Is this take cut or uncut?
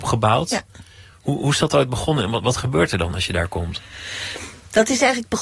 uncut